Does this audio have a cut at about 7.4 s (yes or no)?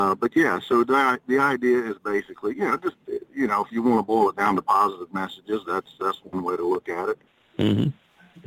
yes